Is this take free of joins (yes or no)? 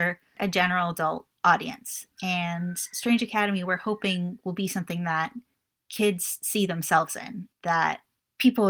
yes